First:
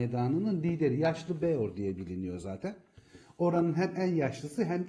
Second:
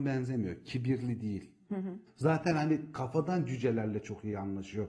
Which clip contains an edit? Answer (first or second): second